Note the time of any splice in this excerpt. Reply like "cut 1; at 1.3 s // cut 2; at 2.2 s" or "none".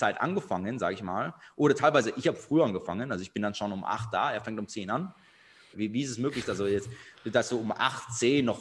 cut 1; at 5.7 s